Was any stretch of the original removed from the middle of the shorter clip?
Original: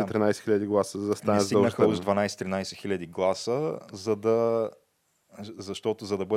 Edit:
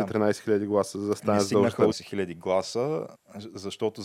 yes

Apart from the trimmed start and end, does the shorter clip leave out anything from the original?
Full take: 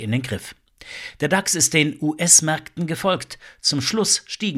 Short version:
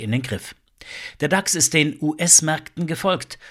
no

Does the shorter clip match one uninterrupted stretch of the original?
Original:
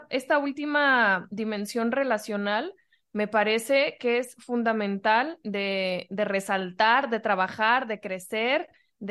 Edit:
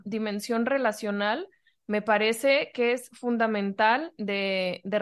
yes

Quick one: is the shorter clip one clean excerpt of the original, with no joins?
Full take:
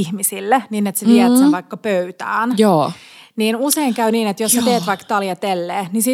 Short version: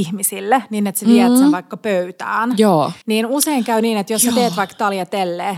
no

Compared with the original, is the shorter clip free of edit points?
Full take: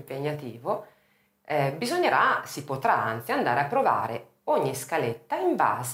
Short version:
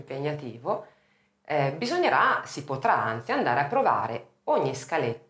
yes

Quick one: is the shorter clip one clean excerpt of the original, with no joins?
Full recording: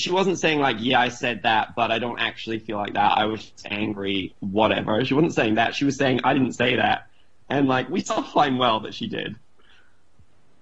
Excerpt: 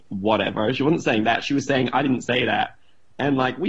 yes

